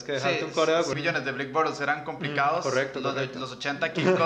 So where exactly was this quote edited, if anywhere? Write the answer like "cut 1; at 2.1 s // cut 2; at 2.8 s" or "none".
cut 1; at 0.9 s